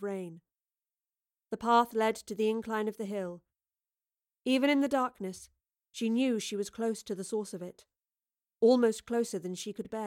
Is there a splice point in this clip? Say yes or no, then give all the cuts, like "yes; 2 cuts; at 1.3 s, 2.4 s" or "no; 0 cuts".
no; 0 cuts